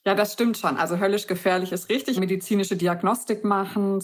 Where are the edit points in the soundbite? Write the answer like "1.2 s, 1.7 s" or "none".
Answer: 2.2 s